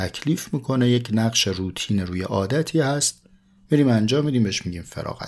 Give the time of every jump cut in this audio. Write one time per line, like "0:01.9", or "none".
none